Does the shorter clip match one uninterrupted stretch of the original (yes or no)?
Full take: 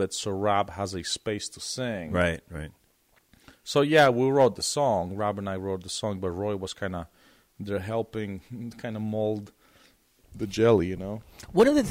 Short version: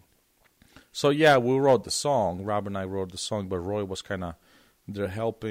yes